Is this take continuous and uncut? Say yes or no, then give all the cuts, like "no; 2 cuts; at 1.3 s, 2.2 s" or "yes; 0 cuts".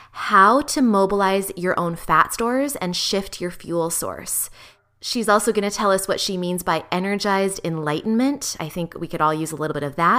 yes; 0 cuts